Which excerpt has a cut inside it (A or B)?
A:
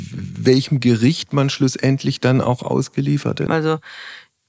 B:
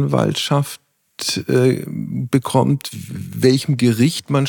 A